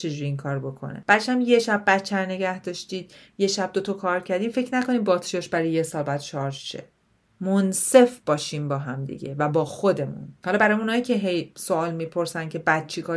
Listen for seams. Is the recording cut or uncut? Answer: uncut